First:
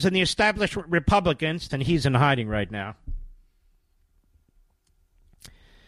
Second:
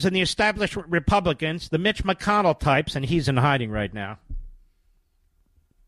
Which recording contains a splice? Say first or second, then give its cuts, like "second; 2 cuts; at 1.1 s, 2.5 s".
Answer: first; 1 cut; at 1.7 s